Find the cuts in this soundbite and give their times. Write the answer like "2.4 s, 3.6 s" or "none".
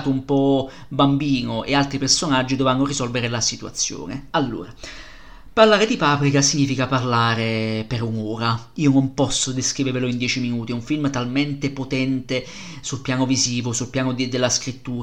none